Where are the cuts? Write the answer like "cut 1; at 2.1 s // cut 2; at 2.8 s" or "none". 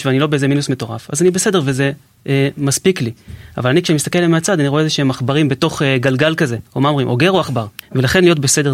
cut 1; at 7.8 s